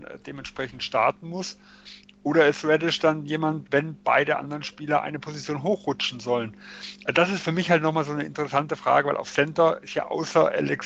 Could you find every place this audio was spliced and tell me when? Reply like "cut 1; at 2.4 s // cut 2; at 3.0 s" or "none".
cut 1; at 3.6 s